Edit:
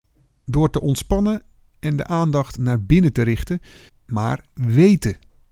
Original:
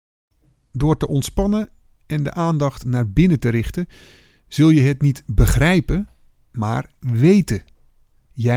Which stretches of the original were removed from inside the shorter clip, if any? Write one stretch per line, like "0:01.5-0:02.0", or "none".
0:04.1-0:06.3